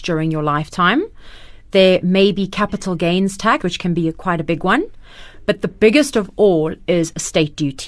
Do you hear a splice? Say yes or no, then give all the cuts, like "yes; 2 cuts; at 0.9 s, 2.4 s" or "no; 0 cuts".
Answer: yes; 1 cut; at 3.6 s